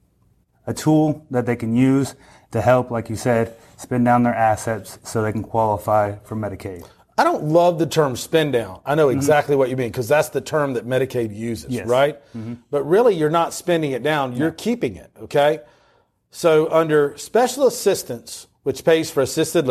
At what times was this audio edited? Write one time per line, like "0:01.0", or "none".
none